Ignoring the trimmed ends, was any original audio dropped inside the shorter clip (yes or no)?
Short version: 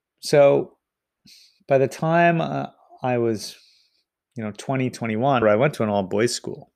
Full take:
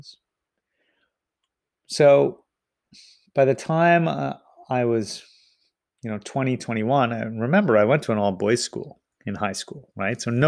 yes